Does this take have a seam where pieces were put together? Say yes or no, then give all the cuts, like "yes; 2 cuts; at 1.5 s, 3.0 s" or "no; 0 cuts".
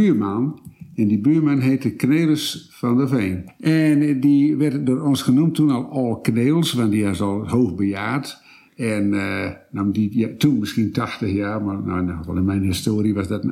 no; 0 cuts